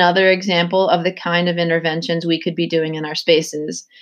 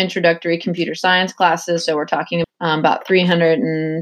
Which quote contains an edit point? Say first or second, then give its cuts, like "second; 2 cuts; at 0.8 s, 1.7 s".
second; 1 cut; at 2.4 s